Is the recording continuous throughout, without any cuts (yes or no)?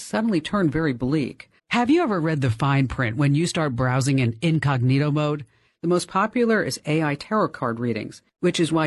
no